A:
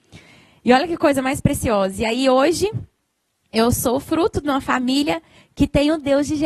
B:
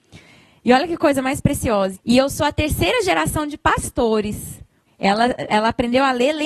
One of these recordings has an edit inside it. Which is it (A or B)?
B